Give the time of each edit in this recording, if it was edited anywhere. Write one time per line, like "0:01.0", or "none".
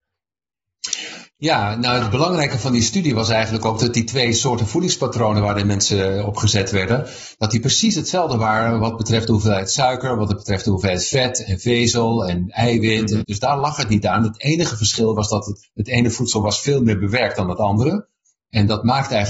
0:13.2
0:15.6